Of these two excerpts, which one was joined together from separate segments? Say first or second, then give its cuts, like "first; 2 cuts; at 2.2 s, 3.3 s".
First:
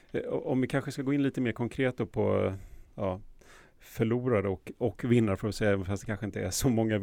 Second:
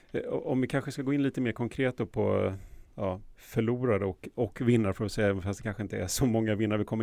second; 1 cut; at 3.3 s